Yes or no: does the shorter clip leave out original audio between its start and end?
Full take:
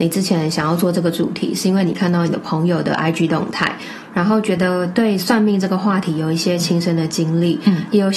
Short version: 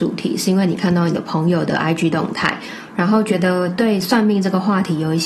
no